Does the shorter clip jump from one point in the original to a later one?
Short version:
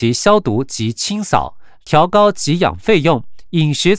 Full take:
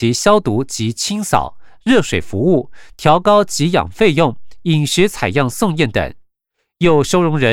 yes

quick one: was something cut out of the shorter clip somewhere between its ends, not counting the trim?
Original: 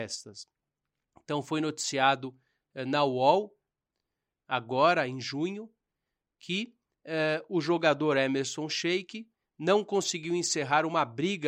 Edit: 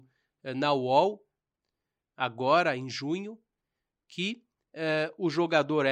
no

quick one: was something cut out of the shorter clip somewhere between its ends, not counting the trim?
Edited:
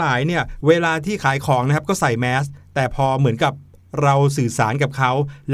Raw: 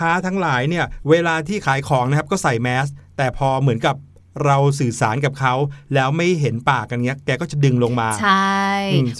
no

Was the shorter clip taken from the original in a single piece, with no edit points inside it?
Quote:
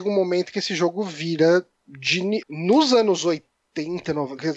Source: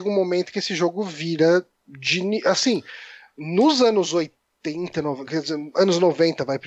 no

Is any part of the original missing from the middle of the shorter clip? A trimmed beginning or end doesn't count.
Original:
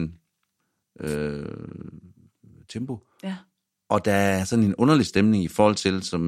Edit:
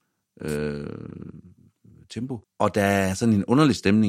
yes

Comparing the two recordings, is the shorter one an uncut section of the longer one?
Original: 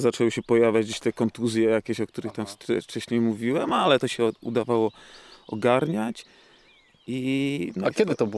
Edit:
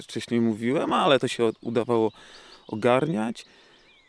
yes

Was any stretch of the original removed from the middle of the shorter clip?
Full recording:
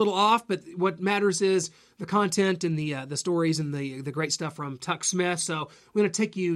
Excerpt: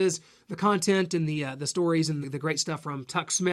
yes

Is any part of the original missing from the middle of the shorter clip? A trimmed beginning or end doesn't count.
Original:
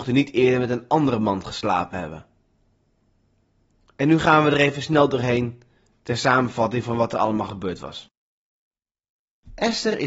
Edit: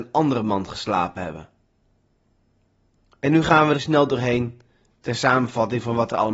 yes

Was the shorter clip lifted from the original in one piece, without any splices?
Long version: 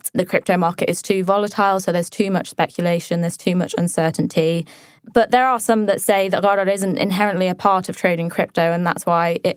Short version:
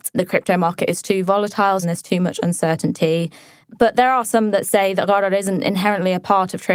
no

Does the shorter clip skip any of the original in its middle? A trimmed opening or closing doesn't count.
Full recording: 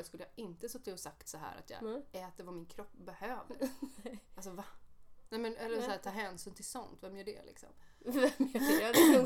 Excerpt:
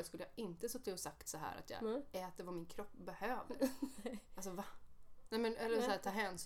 no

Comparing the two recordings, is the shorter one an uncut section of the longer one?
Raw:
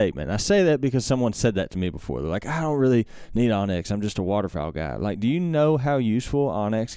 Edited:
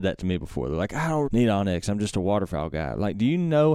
no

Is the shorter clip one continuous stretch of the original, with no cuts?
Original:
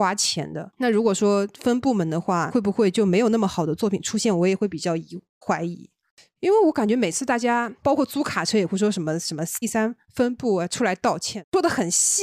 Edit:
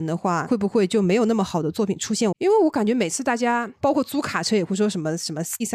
no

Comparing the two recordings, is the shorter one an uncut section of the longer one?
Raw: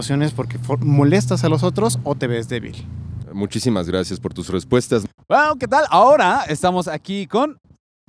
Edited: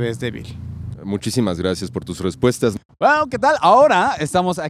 yes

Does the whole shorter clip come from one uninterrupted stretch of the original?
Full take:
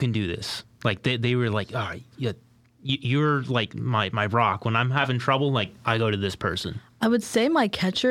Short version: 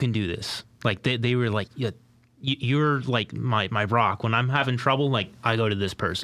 no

